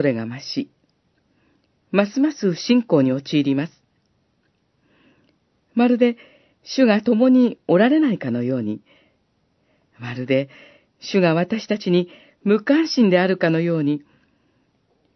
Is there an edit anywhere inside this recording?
no; 0 cuts

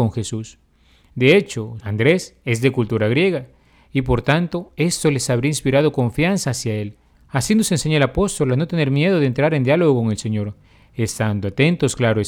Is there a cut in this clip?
yes; 2 cuts; at 1.8 s, 7.1 s

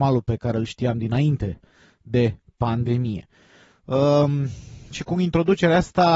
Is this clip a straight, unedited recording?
yes; 0 cuts

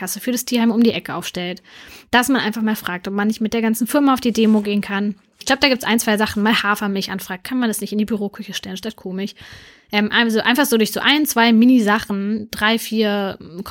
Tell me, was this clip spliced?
no; 0 cuts

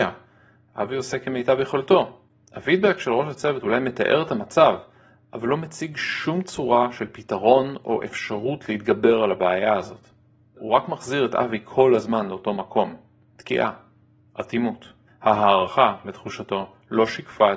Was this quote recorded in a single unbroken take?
no; 1 cut; at 15.1 s

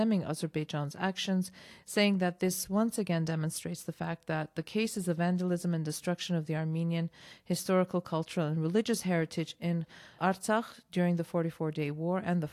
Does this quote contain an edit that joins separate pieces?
yes; 1 cut; at 10.2 s

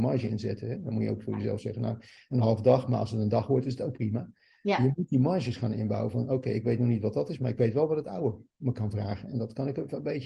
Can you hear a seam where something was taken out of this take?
no; 0 cuts

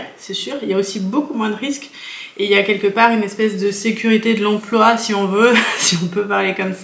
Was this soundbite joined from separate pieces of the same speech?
no; 0 cuts

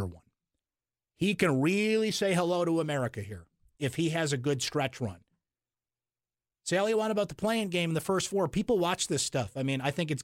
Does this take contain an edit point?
no; 0 cuts

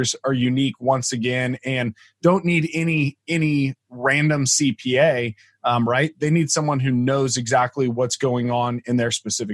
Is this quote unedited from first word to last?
yes; 0 cuts

